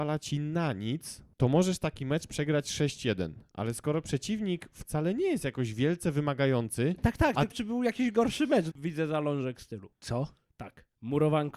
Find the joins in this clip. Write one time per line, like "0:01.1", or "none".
0:01.3
0:07.5
0:08.7